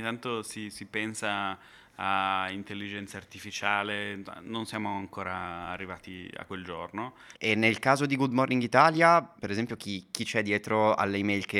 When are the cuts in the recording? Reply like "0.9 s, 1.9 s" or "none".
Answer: 7.3 s, 9.4 s